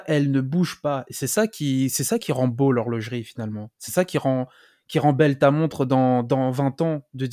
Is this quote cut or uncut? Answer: uncut